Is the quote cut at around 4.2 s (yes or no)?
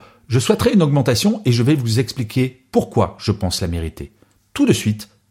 no